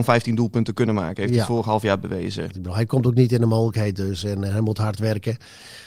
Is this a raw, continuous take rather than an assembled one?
no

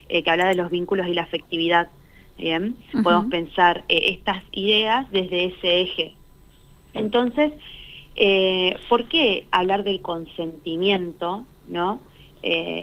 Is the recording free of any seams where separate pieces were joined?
yes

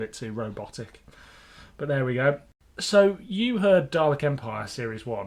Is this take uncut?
yes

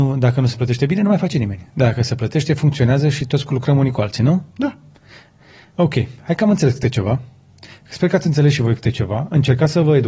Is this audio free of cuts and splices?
yes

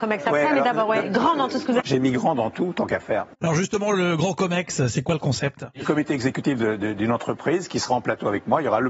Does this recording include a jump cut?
yes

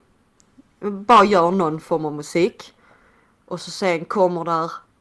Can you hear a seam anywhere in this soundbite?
no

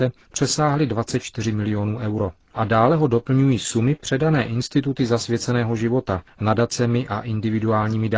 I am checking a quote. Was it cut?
yes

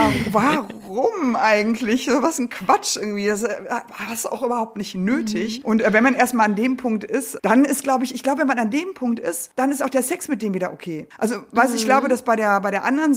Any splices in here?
no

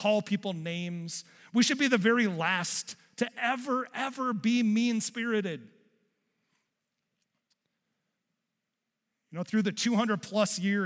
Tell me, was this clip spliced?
no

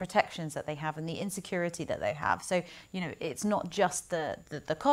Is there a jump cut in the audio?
no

